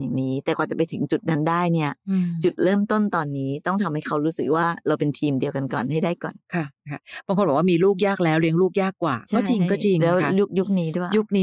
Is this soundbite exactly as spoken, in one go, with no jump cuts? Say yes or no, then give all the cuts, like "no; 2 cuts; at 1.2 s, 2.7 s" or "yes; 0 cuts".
no; 1 cut; at 6.4 s